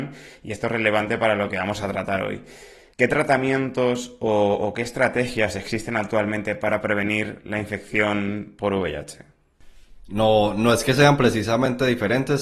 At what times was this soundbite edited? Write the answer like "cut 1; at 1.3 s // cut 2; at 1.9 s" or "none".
cut 1; at 2.9 s // cut 2; at 10.0 s